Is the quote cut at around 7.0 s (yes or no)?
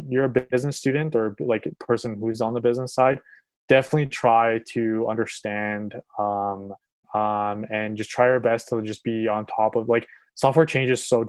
yes